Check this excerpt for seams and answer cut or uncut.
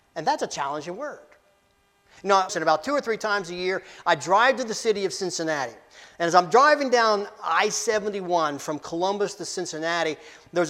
cut